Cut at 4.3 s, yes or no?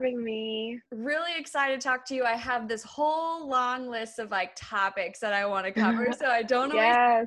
no